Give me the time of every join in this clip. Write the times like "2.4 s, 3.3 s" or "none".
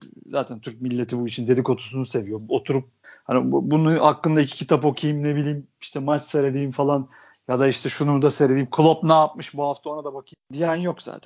none

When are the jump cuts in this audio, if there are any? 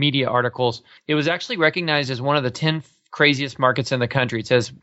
1.0 s

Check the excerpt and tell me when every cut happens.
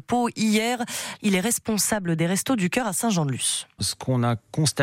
1.2 s, 3.8 s

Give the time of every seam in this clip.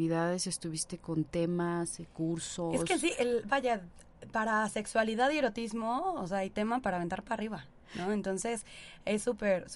none

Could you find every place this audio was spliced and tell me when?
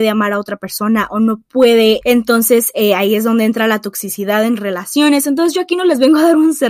2.0 s

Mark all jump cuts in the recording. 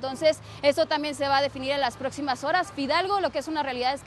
none

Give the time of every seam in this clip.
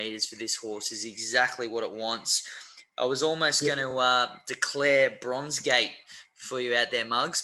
none

